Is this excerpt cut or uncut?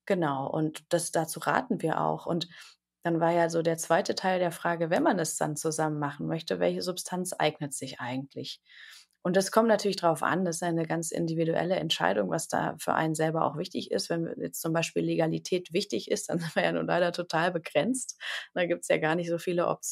uncut